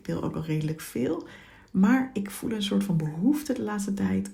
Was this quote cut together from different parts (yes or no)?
no